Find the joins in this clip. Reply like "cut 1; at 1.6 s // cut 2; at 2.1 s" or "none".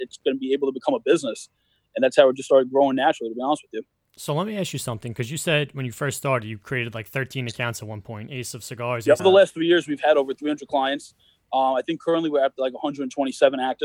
cut 1; at 9.2 s